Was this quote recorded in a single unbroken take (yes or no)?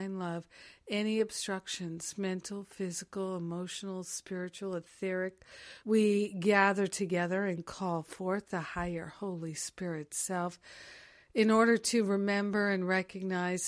no